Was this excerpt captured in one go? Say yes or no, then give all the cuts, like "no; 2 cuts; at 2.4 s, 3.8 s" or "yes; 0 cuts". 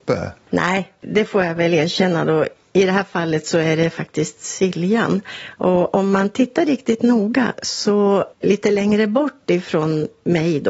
no; 2 cuts; at 1.0 s, 8.3 s